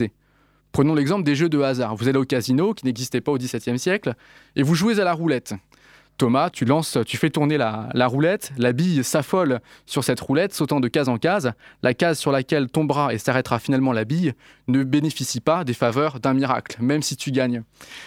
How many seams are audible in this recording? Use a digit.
1